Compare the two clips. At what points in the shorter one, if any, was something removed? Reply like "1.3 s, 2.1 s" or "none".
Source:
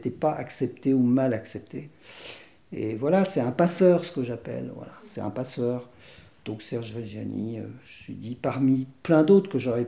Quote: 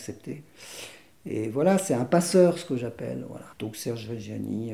3.5 s